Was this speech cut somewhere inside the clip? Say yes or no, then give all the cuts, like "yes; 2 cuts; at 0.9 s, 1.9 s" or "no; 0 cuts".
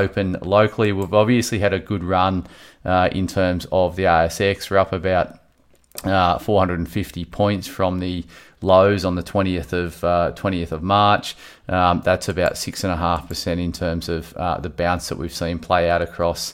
no; 0 cuts